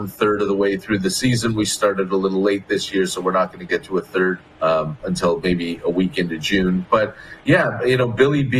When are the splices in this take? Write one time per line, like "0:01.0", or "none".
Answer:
0:04.5